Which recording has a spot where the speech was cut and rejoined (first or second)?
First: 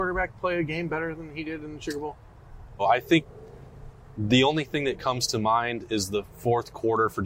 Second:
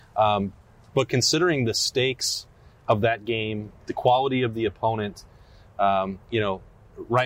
first